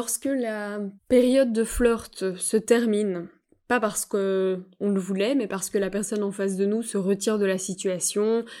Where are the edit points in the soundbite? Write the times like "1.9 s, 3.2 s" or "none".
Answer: 1.0 s